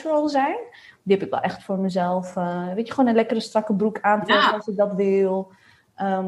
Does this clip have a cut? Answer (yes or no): no